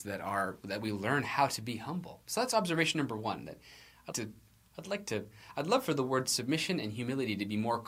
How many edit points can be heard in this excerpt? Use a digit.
1